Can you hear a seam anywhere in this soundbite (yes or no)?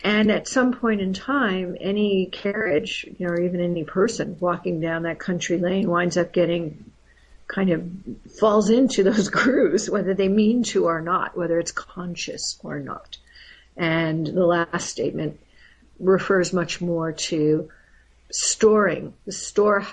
no